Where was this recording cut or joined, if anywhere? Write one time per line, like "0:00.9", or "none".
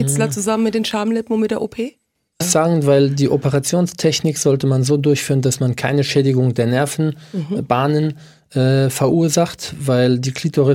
0:02.4